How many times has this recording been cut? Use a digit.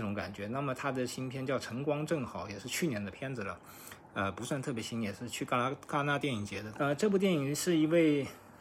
1